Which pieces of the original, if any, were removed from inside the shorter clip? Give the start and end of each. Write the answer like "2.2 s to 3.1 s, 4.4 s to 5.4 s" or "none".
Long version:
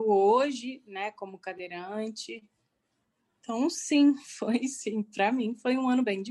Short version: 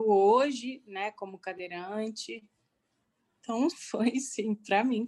3.7 s to 4.2 s